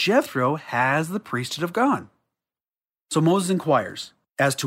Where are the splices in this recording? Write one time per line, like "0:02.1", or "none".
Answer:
none